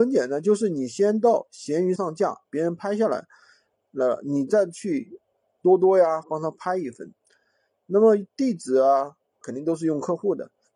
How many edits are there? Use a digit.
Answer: 3